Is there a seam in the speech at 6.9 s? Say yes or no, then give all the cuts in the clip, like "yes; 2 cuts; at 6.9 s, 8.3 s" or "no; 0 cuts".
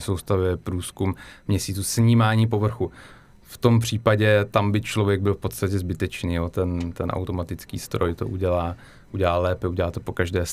yes; 1 cut; at 6.9 s